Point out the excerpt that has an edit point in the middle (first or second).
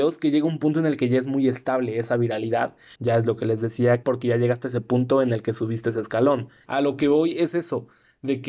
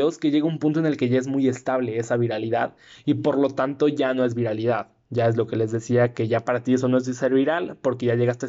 first